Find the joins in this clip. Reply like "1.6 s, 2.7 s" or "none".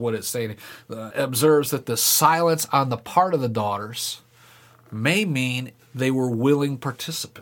1.1 s